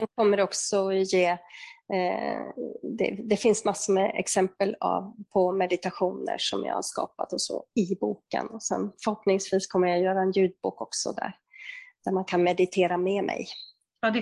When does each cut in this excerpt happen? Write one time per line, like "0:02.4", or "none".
none